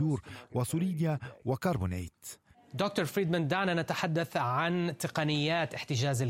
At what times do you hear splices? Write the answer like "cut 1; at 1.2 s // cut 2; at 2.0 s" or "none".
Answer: cut 1; at 2.5 s